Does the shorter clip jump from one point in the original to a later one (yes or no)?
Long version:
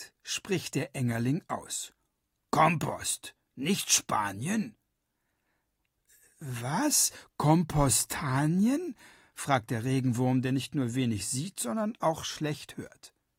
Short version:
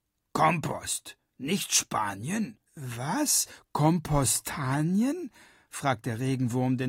yes